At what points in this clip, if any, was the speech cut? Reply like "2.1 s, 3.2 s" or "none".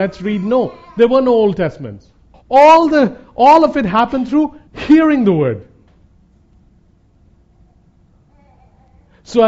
2.3 s, 4.7 s

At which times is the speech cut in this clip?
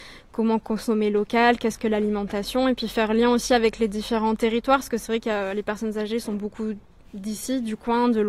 none

